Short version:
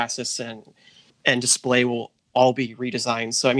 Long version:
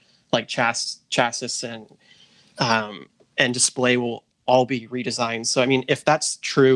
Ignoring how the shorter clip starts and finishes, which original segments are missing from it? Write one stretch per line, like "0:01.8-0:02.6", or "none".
0:02.3-0:03.2